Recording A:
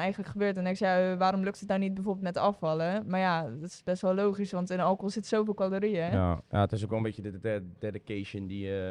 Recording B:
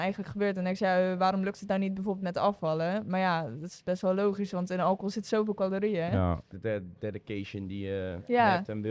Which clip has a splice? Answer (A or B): B